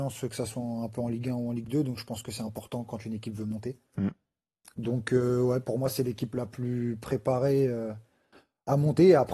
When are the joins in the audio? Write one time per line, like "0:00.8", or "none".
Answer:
none